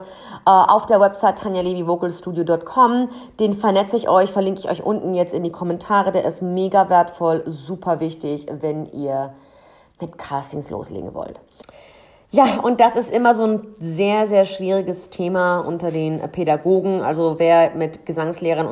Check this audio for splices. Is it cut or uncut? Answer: uncut